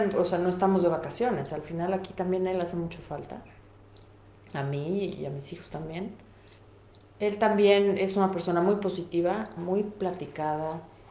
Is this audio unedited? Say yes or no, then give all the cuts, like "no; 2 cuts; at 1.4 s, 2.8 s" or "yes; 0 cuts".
no; 1 cut; at 9.6 s